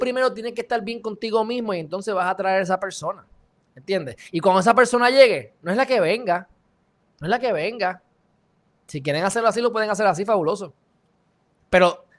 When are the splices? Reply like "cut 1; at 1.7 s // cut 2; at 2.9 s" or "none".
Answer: none

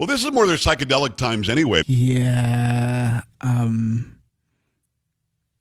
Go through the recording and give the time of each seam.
cut 1; at 1.8 s

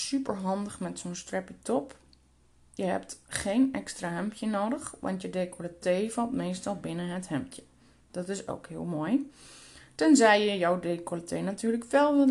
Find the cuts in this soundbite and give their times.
none

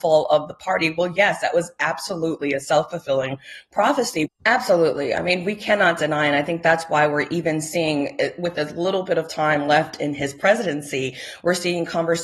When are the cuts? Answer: cut 1; at 4.3 s

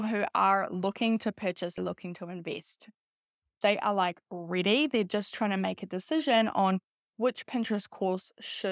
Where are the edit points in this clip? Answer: cut 1; at 1.8 s // cut 2; at 3.6 s

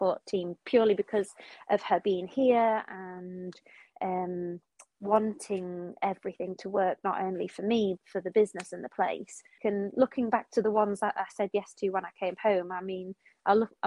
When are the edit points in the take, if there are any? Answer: cut 1; at 8.0 s // cut 2; at 9.6 s

